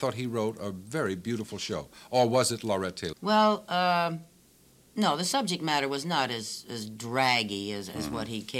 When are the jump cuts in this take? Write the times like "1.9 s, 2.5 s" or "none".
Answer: 3.1 s